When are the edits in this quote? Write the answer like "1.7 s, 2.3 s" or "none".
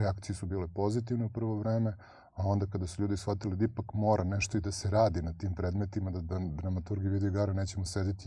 none